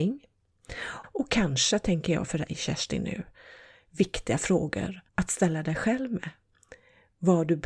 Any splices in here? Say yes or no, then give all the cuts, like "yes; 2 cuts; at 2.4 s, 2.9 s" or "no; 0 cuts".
yes; 2 cuts; at 1.0 s, 5.1 s